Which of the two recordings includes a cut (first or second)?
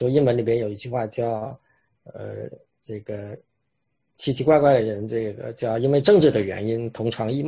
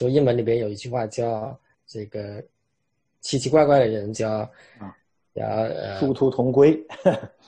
second